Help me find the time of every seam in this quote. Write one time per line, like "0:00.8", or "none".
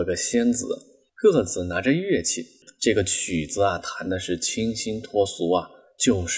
0:01.1